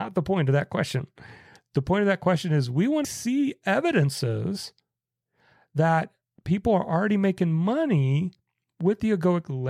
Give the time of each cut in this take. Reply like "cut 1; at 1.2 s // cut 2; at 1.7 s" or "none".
cut 1; at 3.0 s